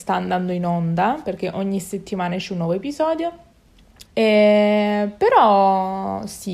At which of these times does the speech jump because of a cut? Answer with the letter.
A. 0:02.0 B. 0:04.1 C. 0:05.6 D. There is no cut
B